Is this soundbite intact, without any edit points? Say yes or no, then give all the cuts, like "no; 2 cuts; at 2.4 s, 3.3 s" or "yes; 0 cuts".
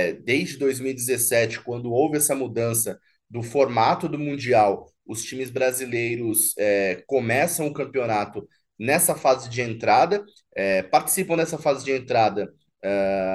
yes; 0 cuts